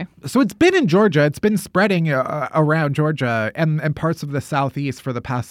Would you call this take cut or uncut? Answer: uncut